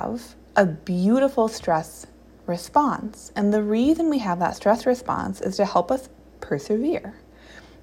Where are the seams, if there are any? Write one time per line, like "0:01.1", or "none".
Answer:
none